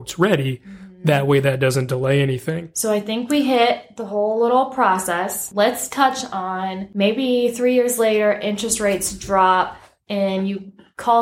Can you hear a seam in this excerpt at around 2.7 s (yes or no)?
yes